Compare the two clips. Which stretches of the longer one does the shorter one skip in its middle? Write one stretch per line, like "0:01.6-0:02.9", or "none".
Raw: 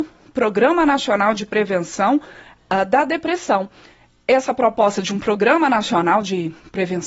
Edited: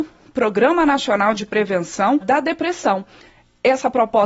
0:02.2-0:02.8